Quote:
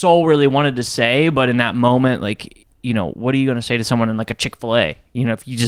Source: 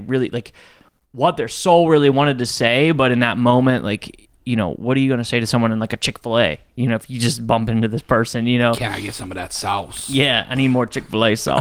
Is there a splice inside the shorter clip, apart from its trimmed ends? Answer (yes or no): no